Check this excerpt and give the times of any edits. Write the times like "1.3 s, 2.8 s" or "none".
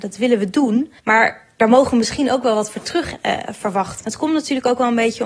1.0 s, 4.0 s